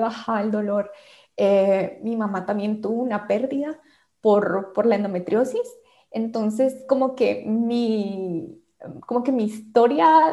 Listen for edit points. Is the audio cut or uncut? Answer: uncut